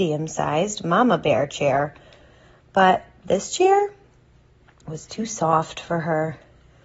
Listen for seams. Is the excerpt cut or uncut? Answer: uncut